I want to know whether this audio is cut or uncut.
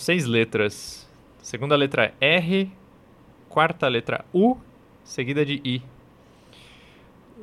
uncut